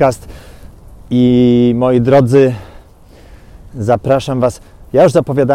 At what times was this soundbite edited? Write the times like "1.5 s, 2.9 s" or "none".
none